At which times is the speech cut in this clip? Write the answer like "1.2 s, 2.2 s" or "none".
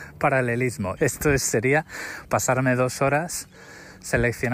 1.0 s, 2.3 s